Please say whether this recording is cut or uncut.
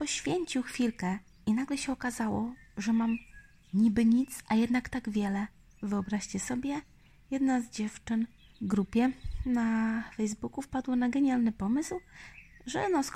cut